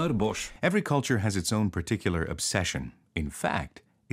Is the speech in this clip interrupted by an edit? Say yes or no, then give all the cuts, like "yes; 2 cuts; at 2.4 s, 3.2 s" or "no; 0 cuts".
yes; 1 cut; at 3.0 s